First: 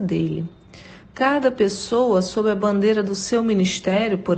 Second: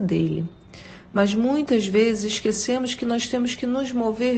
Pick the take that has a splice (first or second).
first